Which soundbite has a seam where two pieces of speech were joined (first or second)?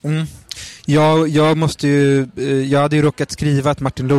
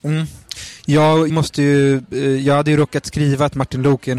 second